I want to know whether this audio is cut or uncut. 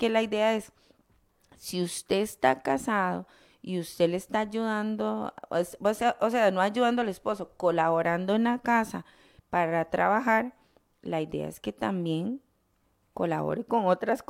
uncut